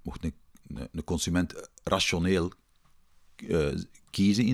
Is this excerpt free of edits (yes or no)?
yes